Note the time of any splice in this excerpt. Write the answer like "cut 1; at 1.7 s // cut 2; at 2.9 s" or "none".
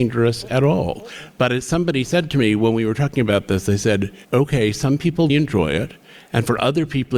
cut 1; at 4.2 s // cut 2; at 5.3 s

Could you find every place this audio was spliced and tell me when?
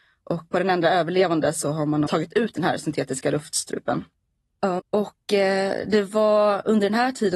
cut 1; at 2.1 s // cut 2; at 4.8 s

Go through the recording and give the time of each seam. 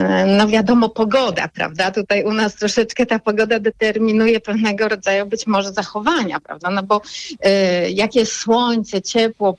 none

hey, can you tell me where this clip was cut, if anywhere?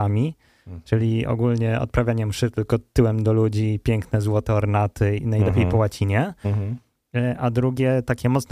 cut 1; at 5.2 s

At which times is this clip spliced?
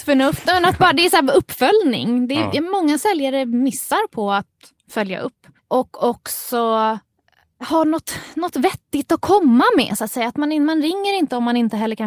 cut 1; at 5.6 s

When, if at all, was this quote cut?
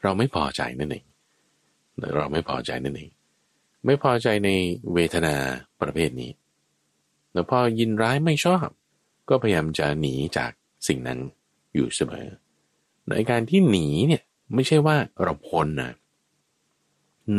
none

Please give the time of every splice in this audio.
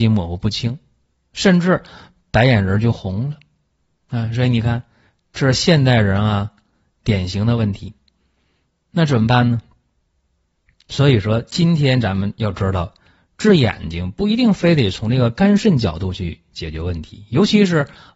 none

